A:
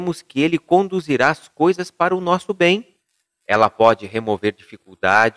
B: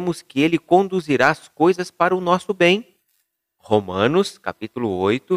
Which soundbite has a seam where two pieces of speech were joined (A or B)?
A